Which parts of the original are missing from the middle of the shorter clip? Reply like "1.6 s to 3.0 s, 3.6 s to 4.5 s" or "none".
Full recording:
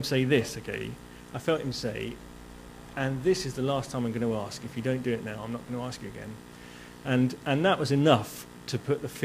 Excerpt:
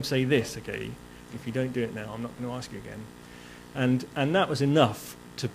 1.3 s to 4.6 s

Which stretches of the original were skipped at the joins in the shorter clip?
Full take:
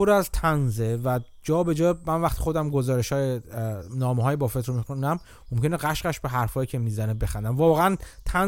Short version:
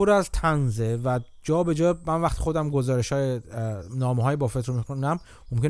none

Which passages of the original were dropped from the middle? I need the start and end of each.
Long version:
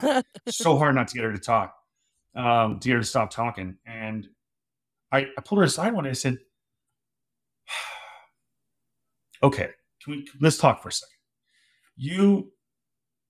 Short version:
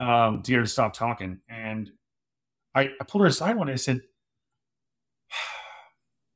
none

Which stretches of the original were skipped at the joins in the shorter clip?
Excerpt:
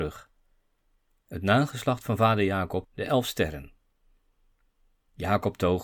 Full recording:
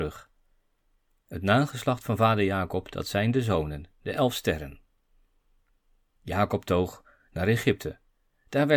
2.8 s to 3.9 s

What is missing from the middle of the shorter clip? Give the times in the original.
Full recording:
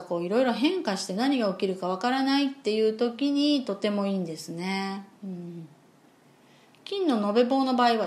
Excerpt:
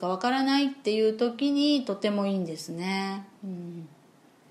none

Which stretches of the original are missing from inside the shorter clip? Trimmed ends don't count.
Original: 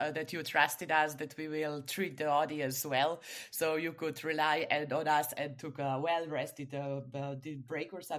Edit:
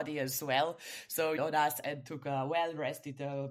3.8 s to 4.9 s

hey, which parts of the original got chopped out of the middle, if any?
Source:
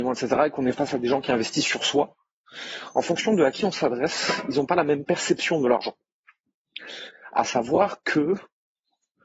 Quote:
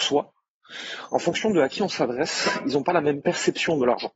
none

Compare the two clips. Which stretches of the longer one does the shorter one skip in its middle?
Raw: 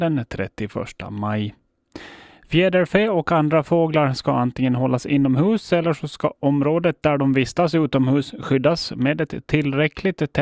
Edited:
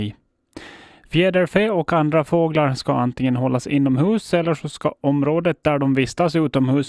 none

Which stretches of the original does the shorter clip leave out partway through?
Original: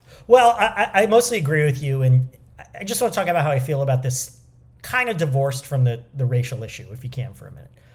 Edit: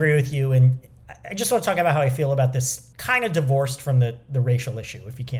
4.4 s to 4.8 s

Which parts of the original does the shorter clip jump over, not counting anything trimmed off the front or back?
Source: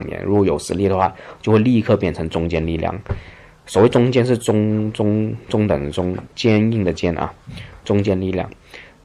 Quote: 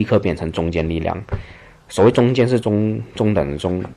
4.4 s to 5.0 s

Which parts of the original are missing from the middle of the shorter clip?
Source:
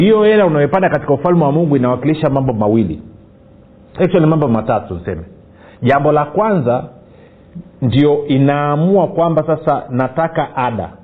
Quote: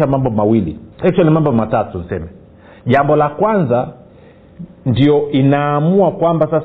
3.1 s to 3.9 s

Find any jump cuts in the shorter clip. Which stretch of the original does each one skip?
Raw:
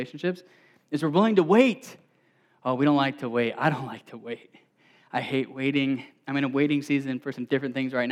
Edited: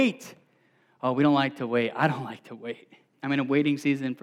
4.7 s to 6.2 s

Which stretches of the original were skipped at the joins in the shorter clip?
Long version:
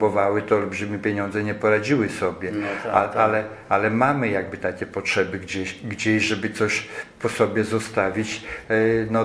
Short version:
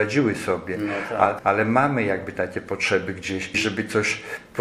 3.1 s to 3.6 s, 5.8 s to 6.2 s

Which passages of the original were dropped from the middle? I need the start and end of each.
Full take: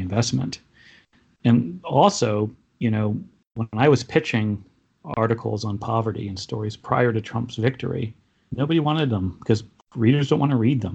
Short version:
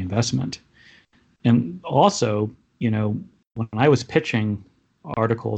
none

